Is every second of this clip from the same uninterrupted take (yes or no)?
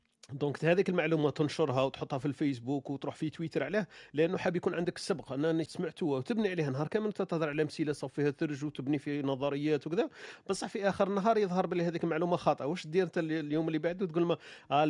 no